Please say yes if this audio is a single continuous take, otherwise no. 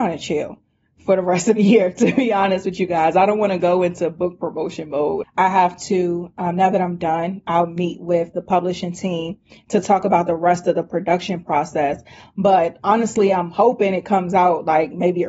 no